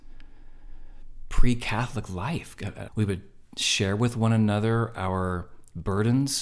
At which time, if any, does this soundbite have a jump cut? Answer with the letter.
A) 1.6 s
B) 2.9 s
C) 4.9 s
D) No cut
B